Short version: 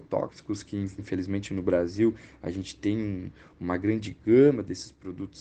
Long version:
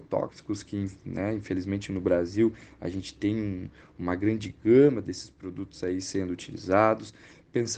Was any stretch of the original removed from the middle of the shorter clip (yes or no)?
yes